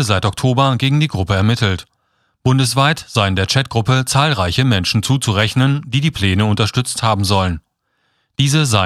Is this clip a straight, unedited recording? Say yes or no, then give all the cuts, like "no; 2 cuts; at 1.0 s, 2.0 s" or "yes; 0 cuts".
yes; 0 cuts